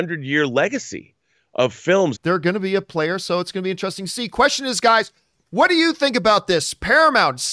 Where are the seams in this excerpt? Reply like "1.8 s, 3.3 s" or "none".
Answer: 2.1 s